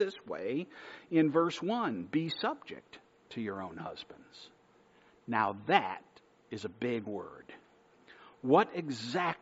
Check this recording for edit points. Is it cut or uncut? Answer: uncut